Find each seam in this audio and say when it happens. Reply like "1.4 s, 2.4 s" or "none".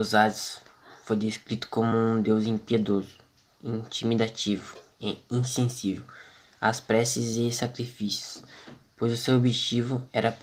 none